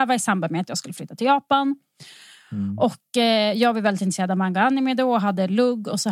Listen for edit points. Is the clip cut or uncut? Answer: uncut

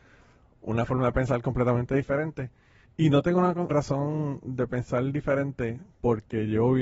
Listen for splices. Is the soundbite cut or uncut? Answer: cut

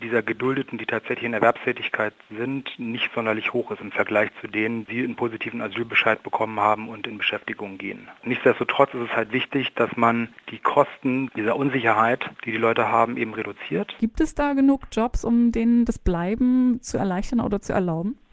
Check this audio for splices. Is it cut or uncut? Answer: cut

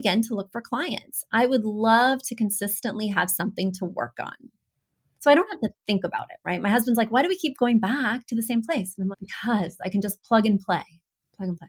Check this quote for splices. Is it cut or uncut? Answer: cut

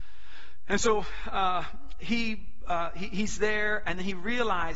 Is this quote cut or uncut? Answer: uncut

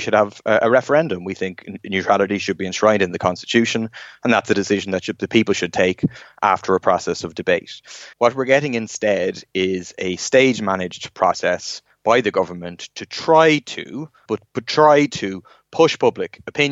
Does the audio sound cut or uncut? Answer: cut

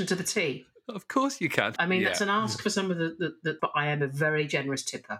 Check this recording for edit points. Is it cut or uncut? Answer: cut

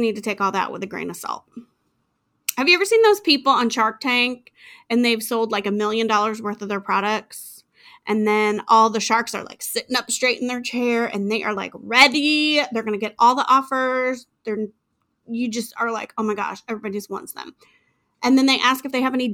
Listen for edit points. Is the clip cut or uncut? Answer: uncut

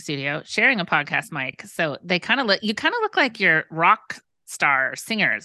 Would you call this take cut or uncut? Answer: uncut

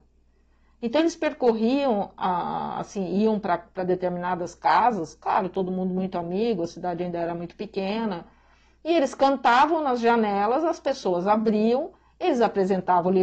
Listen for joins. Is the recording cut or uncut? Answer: uncut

